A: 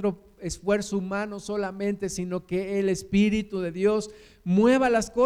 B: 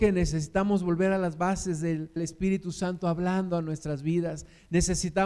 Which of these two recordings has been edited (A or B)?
B